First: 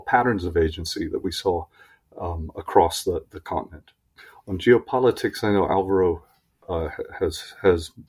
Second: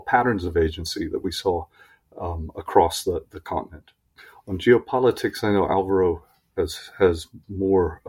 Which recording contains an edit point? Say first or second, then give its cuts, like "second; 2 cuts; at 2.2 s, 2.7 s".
second; 1 cut; at 6.6 s